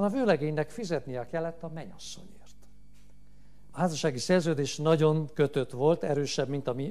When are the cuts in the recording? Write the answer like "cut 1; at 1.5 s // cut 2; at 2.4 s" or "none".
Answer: cut 1; at 3.7 s

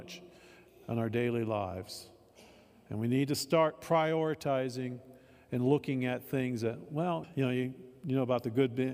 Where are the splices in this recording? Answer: cut 1; at 7.2 s

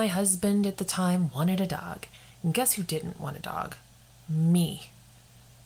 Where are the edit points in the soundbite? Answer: none

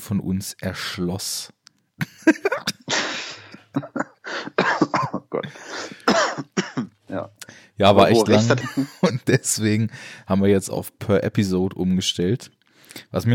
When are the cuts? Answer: cut 1; at 8.6 s

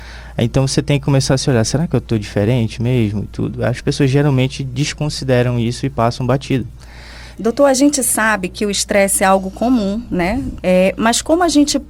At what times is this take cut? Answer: cut 1; at 7.3 s // cut 2; at 10.6 s

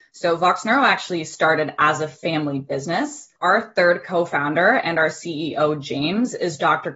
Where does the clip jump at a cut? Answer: cut 1; at 3.4 s

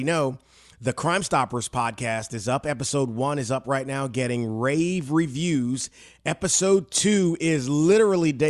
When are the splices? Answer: none

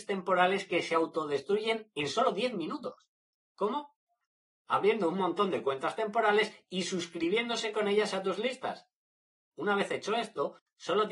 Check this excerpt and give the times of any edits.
cut 1; at 3.4 s

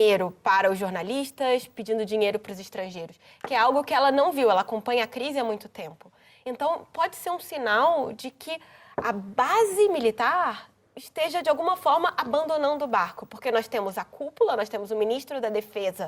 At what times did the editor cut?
none

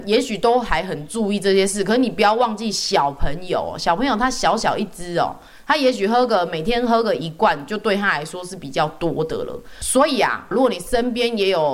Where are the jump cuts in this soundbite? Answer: cut 1; at 10.5 s

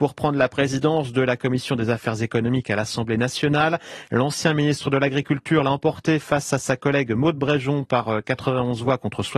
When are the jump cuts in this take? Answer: none

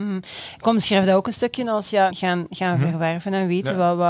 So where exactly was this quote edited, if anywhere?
cut 1; at 2.1 s

